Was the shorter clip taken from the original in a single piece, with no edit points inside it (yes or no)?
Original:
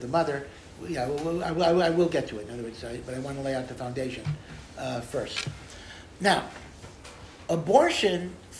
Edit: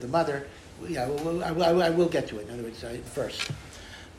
no